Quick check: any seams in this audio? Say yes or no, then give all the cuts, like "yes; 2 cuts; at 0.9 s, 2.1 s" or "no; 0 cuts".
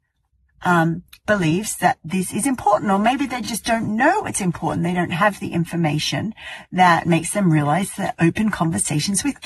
no; 0 cuts